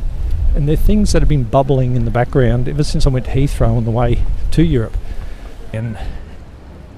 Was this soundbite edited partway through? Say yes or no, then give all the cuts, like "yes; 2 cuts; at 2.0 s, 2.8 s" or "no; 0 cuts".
yes; 1 cut; at 5.7 s